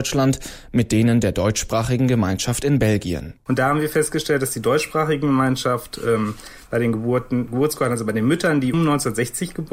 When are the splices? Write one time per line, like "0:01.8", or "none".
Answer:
0:08.7